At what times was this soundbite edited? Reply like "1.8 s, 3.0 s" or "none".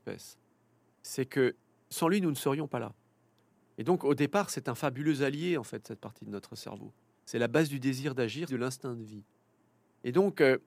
3.6 s, 7.1 s, 8.5 s

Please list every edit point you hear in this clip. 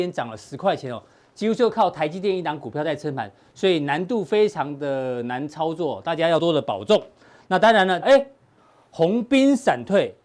6.4 s, 8.0 s

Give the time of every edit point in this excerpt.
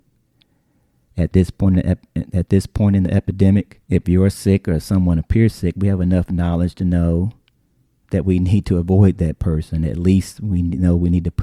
3.8 s

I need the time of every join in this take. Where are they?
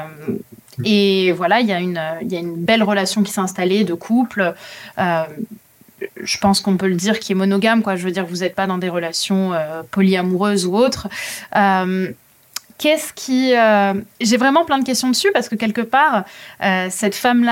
14.2 s

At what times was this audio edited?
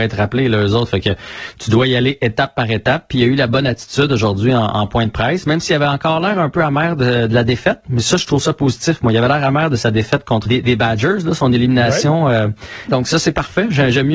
10.5 s, 12.9 s

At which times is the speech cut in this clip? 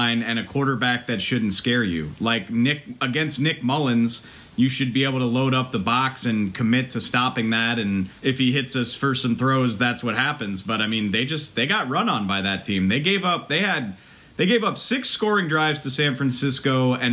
8.2 s

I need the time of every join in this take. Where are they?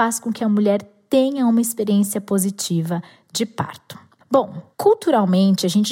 4.2 s

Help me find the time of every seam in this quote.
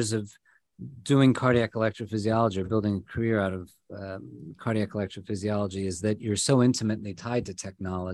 none

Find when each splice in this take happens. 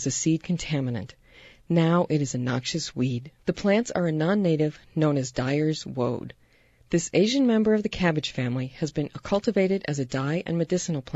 3.4 s

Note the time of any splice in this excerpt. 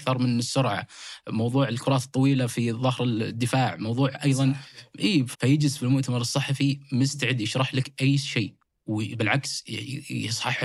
5.3 s

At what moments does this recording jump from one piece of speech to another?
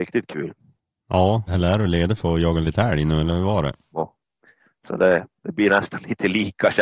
1.5 s, 3.9 s

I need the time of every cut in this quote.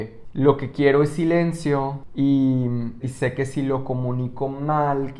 3.0 s

